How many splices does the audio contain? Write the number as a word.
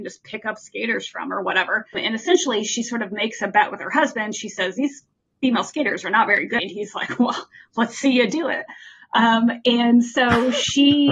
two